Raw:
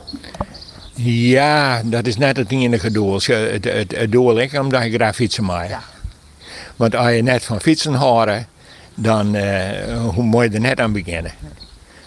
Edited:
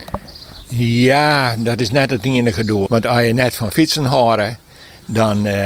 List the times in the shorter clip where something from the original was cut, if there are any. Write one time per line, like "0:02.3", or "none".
0:02.9